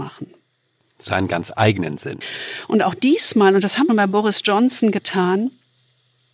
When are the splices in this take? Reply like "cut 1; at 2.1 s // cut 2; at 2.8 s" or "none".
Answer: cut 1; at 3.9 s